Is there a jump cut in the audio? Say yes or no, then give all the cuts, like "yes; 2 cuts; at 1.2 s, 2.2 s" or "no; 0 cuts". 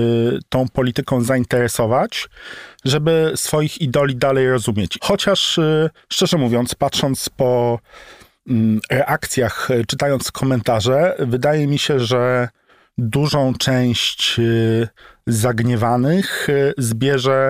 yes; 1 cut; at 5.0 s